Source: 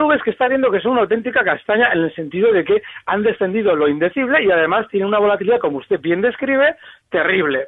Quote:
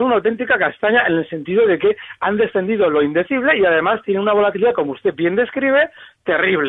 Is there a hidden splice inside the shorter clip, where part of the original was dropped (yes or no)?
no